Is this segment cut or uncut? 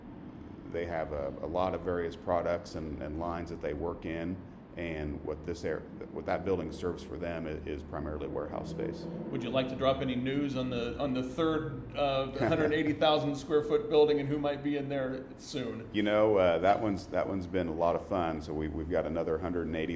uncut